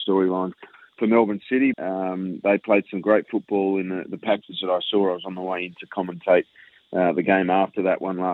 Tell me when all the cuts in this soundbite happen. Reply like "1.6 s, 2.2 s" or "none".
1.7 s